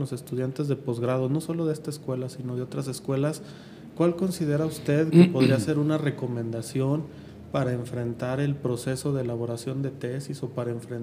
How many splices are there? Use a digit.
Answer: 0